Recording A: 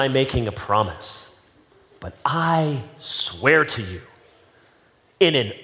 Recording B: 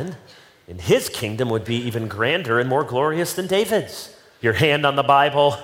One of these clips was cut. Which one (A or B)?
B